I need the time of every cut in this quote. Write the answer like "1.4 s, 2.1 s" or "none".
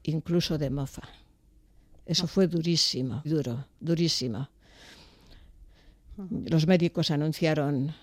3.2 s